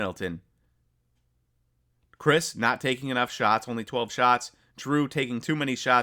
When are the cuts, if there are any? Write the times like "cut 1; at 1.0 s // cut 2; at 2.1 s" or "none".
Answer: none